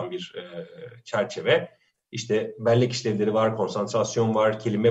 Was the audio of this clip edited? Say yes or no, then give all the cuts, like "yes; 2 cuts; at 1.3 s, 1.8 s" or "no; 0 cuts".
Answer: no; 0 cuts